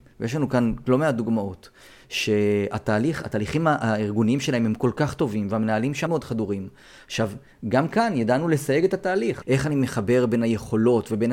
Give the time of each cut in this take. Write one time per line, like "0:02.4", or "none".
0:06.1
0:09.4